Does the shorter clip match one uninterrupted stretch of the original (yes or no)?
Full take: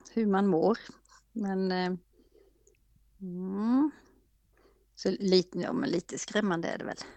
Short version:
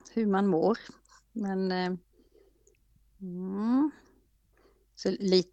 yes